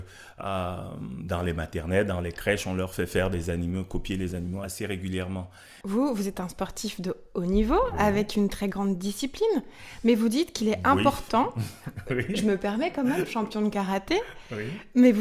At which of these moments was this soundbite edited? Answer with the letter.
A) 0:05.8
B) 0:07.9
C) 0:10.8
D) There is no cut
A